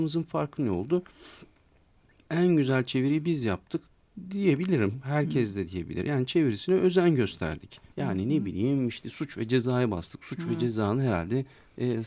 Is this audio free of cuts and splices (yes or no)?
no